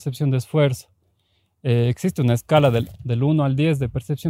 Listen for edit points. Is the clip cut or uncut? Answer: uncut